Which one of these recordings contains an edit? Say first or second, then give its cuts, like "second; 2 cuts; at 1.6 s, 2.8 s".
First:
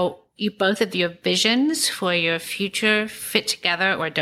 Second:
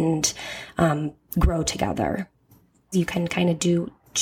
second; 1 cut; at 2.9 s